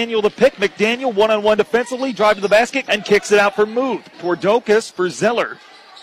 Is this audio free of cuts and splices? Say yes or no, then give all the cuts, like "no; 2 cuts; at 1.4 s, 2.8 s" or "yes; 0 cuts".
no; 2 cuts; at 2.9 s, 4.1 s